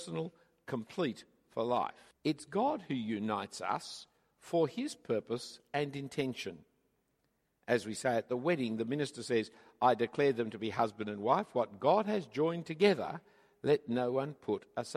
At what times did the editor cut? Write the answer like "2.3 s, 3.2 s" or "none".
2.1 s